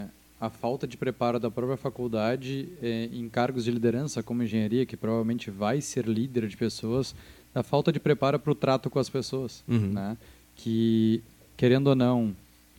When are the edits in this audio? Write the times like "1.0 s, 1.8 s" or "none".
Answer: none